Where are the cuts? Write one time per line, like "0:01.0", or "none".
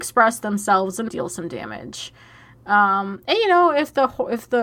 0:01.1